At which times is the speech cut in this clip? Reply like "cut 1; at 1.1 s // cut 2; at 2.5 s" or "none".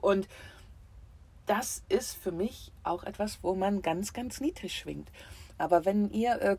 cut 1; at 5.6 s